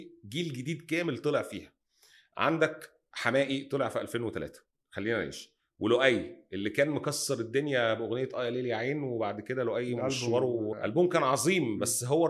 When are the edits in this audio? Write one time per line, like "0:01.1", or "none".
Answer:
0:10.7